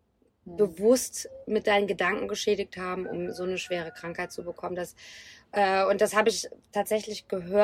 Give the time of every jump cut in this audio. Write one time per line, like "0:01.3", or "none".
none